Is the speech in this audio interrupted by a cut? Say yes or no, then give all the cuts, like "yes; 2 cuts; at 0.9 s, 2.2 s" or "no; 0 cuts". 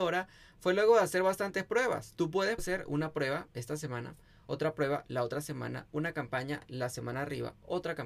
yes; 1 cut; at 2.6 s